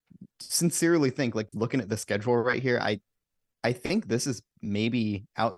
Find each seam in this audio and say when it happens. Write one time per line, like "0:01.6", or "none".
0:01.5